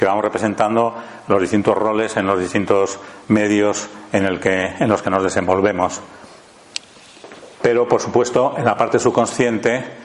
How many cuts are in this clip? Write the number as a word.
one